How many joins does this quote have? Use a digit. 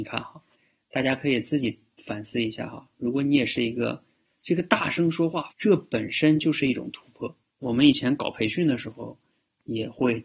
3